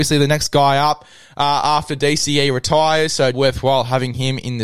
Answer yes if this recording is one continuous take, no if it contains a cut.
no